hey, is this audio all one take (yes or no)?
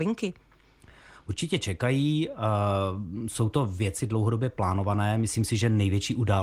yes